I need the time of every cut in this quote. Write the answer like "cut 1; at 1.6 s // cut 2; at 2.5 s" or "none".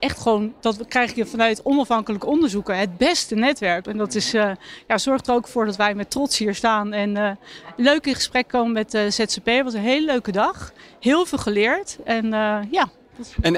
cut 1; at 3.8 s